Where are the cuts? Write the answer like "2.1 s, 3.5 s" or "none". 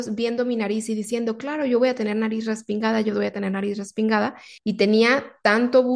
4.6 s